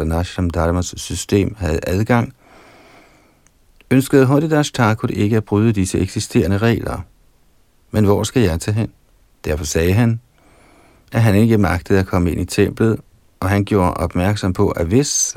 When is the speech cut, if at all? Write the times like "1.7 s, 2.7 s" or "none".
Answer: 7.7 s, 9.3 s